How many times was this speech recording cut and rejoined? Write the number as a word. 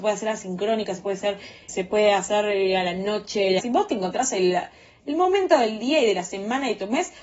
two